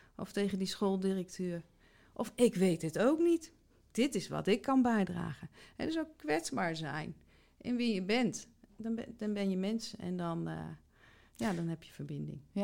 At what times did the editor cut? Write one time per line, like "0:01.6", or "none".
none